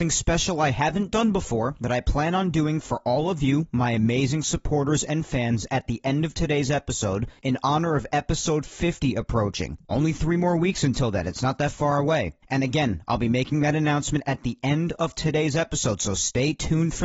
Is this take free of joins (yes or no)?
yes